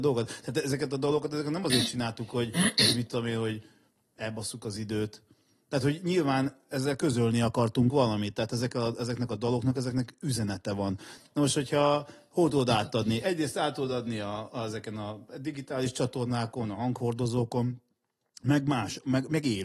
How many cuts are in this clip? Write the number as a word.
one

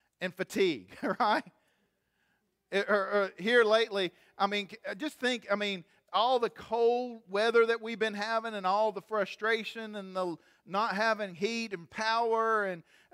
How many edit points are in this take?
zero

